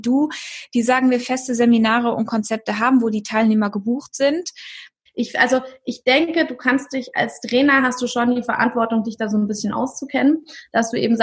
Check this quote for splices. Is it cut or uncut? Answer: cut